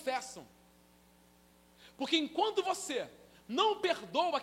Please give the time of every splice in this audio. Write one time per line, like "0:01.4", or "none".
none